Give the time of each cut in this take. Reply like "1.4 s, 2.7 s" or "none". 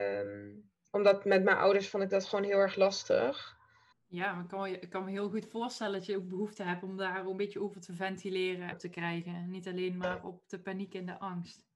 3.9 s, 8.7 s